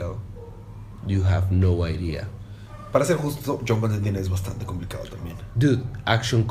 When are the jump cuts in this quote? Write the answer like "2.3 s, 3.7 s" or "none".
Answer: none